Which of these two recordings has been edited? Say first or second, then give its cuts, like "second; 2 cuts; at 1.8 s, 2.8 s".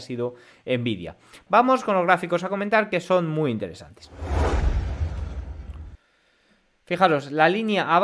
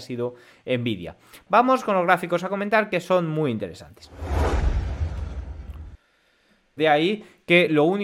second; 1 cut; at 6.8 s